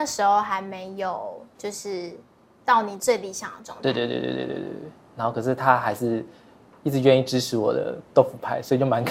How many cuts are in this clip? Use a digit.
0